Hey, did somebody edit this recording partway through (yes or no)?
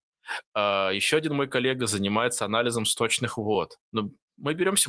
yes